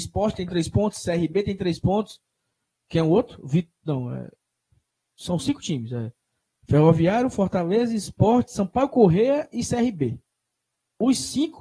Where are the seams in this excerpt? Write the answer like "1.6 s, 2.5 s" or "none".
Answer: none